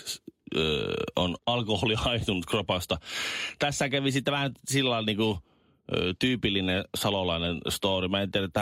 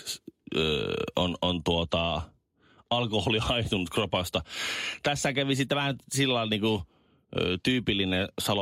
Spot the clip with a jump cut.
first; 1 cut; at 1.4 s

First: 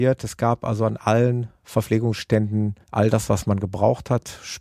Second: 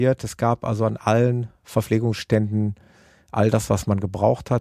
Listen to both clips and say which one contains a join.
first; 1 cut; at 2.8 s

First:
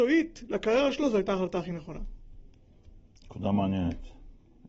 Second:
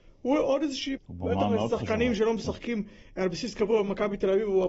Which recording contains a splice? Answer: second; 1 cut; at 1.0 s

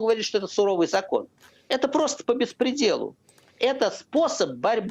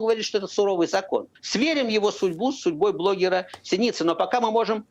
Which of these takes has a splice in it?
second; 1 cut; at 1.3 s

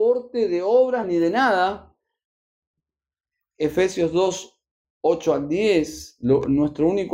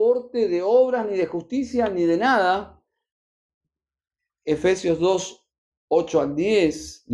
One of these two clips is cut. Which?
first; 1 cut; at 1.0 s

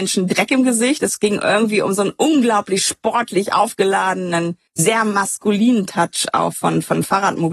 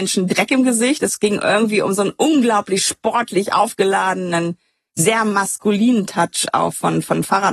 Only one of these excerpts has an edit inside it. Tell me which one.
first; 1 cut; at 4.7 s

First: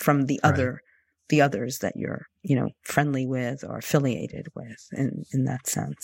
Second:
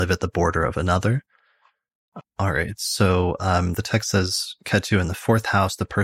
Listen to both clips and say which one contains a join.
second; 1 cut; at 2.2 s

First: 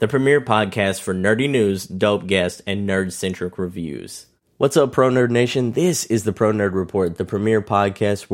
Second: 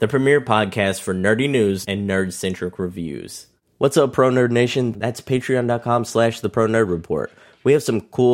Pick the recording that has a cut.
second; 2 cuts; at 1.8 s, 4.9 s

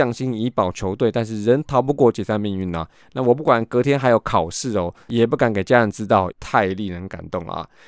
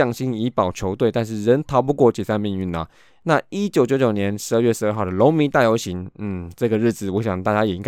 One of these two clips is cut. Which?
first; 3 cuts; at 3.0 s, 5.1 s, 6.3 s

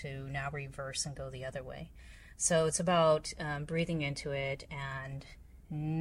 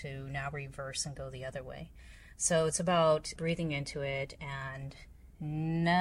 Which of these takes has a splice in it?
second; 1 cut; at 3.4 s

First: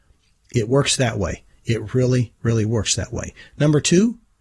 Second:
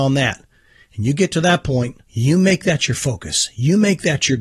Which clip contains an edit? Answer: second; 1 cut; at 2.0 s

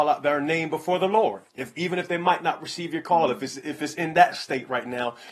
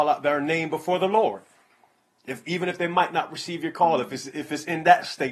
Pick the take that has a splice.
first; 1 cut; at 1.5 s

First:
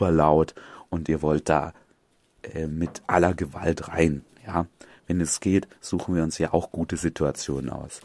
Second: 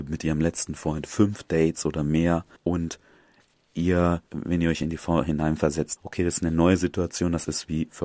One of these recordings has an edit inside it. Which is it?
second; 3 cuts; at 2.6 s, 4.3 s, 6.0 s

